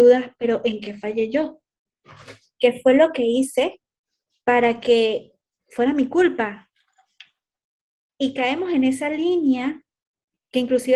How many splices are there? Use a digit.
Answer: 0